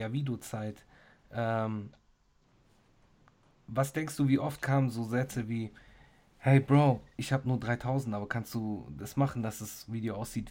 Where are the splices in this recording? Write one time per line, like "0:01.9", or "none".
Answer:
none